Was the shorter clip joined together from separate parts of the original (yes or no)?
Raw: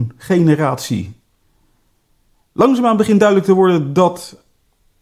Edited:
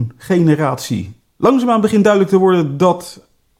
yes